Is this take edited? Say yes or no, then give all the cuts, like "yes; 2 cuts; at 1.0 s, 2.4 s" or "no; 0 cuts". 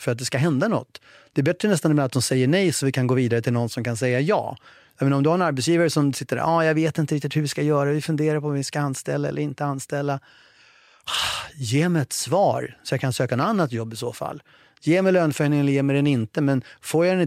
no; 0 cuts